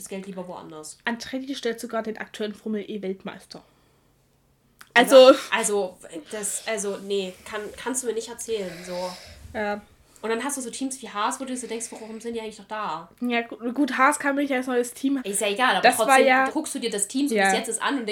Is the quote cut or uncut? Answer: cut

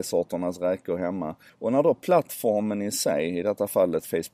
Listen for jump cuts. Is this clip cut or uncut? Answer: cut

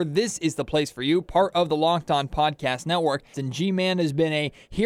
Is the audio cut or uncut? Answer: cut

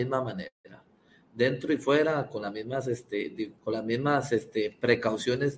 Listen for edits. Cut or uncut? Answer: cut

